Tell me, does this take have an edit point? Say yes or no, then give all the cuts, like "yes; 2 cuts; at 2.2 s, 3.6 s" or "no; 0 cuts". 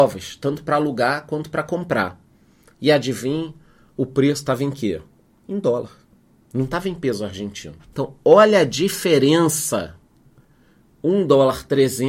yes; 1 cut; at 7.9 s